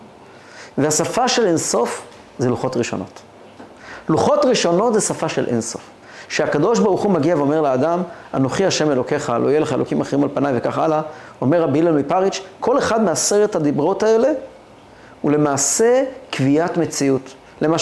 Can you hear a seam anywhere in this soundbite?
no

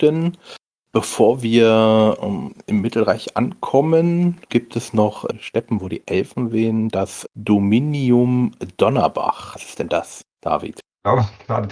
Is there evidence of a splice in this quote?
yes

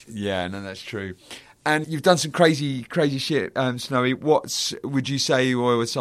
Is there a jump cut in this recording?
yes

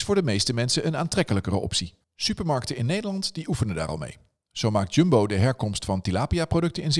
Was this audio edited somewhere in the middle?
yes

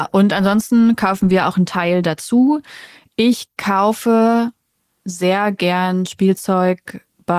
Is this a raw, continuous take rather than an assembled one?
yes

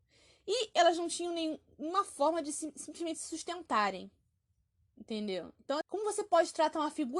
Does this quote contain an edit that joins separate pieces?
yes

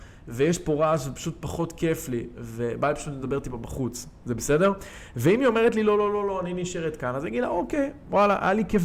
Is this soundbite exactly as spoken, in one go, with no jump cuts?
yes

